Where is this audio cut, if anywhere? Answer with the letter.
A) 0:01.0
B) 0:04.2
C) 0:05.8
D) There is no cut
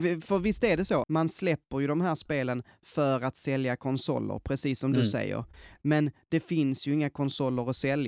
A